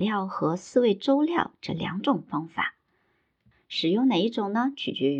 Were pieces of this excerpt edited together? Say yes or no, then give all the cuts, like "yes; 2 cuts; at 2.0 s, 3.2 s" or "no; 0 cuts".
no; 0 cuts